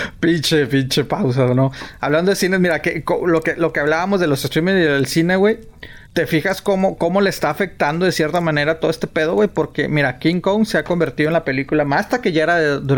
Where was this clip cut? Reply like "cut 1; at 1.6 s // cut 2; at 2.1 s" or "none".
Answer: cut 1; at 6.1 s